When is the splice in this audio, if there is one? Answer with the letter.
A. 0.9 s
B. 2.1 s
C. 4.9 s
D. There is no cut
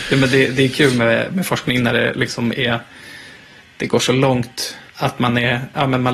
C